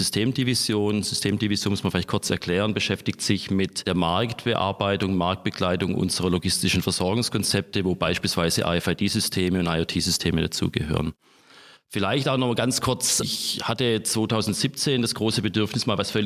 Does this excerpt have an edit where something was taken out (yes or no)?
no